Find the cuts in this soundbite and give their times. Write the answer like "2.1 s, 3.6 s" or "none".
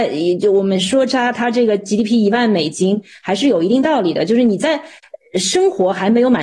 none